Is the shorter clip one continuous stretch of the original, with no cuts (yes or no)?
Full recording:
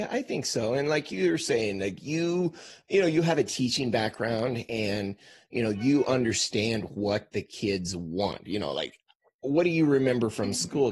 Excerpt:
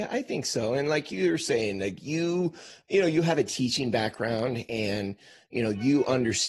yes